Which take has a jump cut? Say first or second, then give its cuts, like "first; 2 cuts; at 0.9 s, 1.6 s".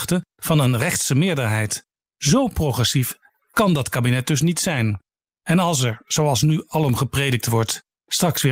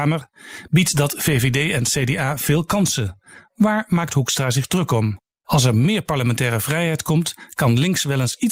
second; 1 cut; at 5.4 s